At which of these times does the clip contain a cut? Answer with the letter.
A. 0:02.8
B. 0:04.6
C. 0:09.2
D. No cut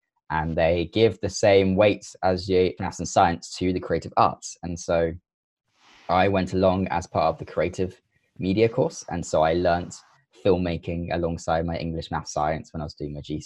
A